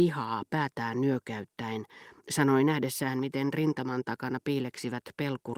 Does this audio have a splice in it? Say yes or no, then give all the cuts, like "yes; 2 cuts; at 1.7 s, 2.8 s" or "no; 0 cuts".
no; 0 cuts